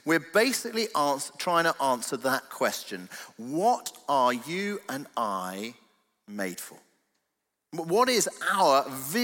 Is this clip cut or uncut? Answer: uncut